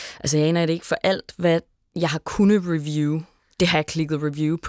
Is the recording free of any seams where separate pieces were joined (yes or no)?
yes